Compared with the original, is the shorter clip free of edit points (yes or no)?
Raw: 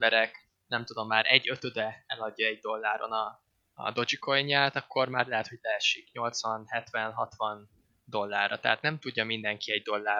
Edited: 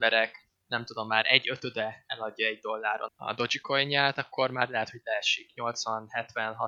no